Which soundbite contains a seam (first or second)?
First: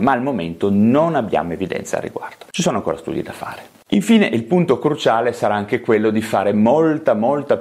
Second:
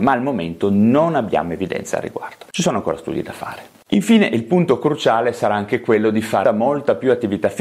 second